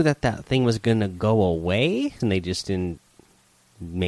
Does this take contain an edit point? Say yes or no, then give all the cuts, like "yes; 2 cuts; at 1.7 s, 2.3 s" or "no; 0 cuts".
yes; 1 cut; at 2.2 s